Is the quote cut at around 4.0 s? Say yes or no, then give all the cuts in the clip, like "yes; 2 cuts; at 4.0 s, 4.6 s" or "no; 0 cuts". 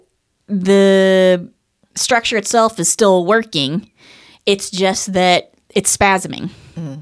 no; 0 cuts